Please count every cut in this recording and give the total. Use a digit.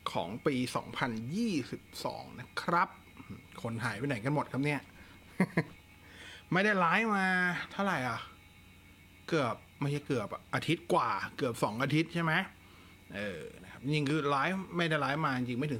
1